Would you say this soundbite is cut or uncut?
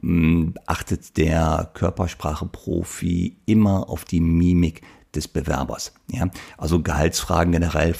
uncut